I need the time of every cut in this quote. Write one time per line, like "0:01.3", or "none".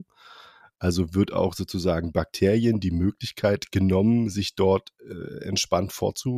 none